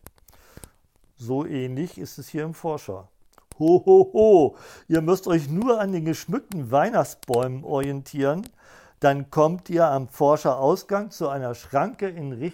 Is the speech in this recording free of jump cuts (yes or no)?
no